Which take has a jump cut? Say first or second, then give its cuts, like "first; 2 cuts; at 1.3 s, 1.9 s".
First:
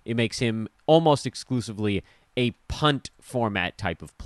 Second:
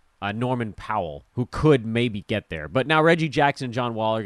second; 1 cut; at 1.3 s